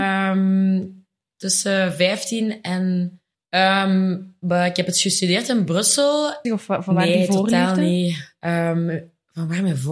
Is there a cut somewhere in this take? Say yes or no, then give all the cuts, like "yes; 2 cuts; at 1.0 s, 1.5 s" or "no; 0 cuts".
yes; 2 cuts; at 3.3 s, 6.4 s